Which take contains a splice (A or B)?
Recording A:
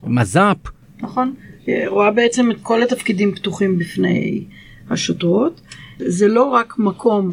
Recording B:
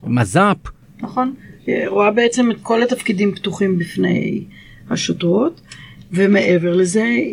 A